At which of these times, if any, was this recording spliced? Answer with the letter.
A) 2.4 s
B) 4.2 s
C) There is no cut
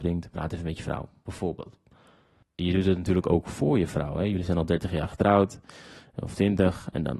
A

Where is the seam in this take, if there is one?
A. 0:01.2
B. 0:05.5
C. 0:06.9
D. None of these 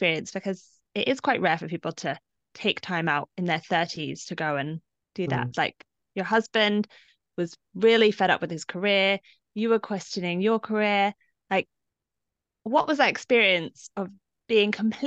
B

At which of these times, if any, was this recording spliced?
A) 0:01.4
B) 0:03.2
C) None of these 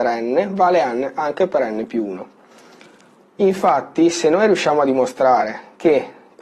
B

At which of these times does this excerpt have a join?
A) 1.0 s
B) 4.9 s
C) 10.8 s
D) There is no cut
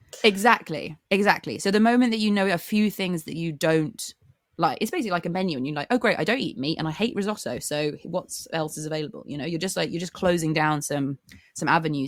A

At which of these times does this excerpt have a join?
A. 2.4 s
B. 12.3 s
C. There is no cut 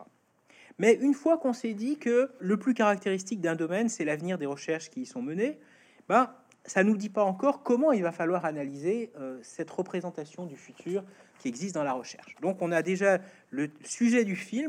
A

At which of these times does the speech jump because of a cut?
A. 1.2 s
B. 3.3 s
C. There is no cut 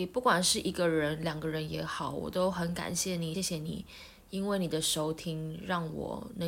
B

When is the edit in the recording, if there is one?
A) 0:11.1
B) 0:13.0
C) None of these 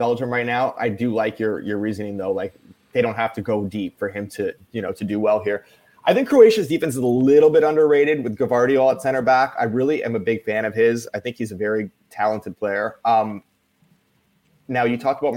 C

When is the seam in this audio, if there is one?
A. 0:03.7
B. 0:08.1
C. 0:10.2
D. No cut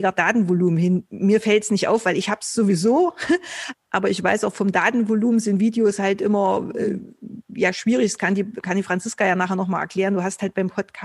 A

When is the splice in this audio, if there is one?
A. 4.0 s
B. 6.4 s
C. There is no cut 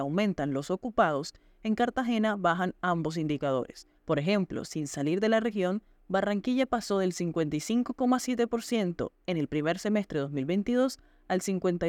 A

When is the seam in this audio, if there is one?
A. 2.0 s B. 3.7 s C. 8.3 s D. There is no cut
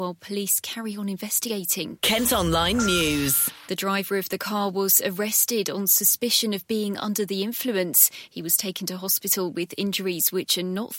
B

